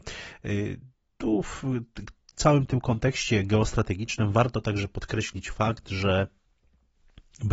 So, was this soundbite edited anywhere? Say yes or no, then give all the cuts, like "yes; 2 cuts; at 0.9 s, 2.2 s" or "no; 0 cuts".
no; 0 cuts